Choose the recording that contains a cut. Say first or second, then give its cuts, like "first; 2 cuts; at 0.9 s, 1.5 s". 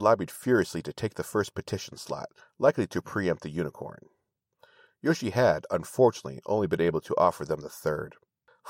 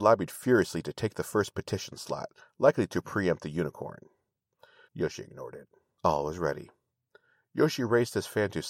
second; 1 cut; at 4.9 s